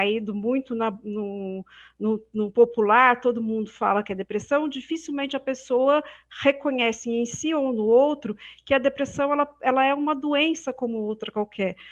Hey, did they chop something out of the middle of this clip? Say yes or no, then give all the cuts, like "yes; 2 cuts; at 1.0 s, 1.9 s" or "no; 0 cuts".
no; 0 cuts